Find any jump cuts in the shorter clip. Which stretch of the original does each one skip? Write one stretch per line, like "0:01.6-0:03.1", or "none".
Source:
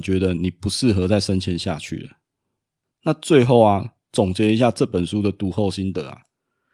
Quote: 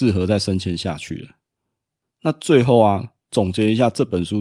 none